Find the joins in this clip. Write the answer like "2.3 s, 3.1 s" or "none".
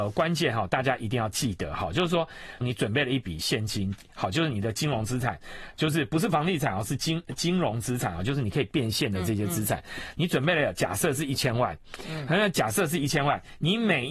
2.6 s